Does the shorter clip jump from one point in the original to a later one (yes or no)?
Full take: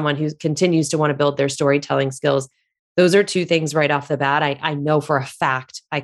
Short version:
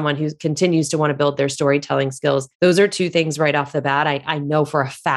yes